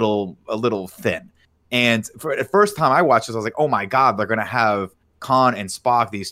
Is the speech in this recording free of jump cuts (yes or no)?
yes